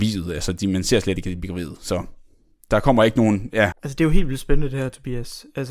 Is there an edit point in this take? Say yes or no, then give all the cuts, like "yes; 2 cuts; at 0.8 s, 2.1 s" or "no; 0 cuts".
yes; 1 cut; at 3.7 s